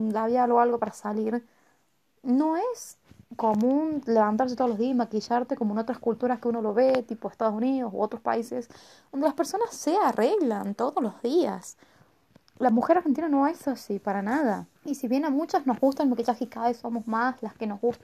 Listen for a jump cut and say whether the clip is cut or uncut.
cut